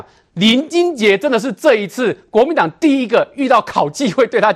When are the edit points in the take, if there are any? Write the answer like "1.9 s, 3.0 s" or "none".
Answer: none

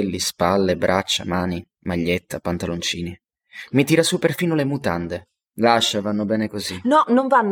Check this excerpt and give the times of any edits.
none

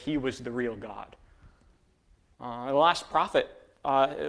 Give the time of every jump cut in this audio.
2.3 s

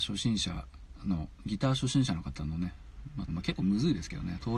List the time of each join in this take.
3.3 s

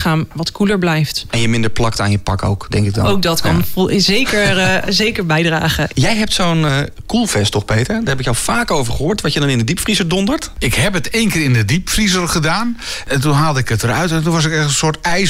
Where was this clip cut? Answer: none

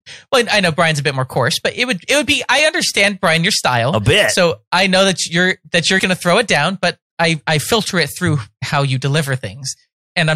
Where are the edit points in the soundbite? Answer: 6.0 s

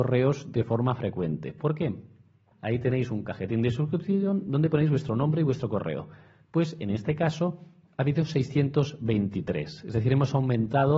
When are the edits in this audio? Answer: 2.5 s

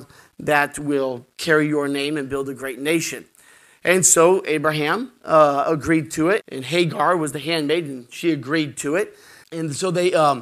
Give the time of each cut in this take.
6.4 s, 9.4 s

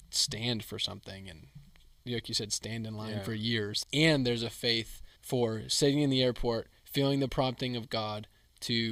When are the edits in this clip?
3.8 s, 5.2 s

